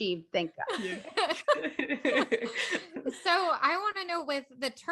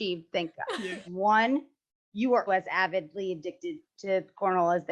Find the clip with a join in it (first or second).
second